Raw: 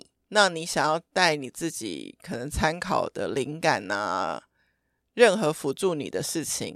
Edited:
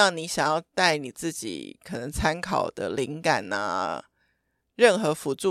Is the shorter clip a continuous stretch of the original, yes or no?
yes